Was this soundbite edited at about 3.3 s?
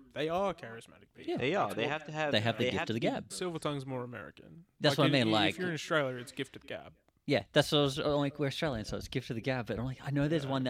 yes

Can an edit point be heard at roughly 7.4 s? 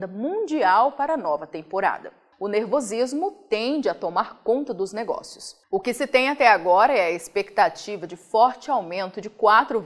no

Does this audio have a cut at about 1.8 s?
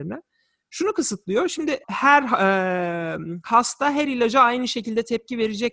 yes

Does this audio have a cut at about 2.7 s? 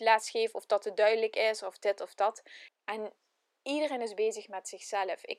yes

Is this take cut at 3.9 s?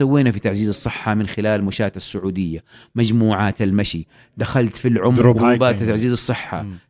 no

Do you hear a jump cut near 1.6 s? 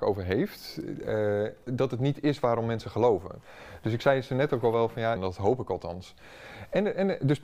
yes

